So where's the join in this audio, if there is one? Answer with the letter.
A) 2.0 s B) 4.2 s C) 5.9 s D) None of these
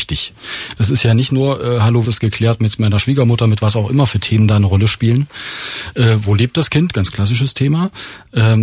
A